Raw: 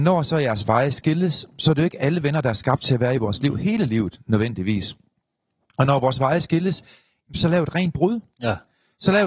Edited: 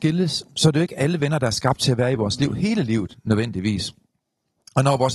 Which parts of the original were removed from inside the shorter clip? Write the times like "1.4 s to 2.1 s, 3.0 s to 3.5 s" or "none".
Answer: none